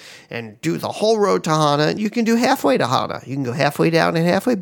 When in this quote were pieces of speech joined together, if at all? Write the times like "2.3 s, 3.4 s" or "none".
2.0 s